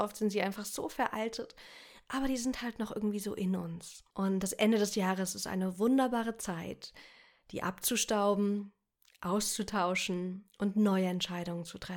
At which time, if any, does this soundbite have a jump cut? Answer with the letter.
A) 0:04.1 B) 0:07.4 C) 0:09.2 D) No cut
A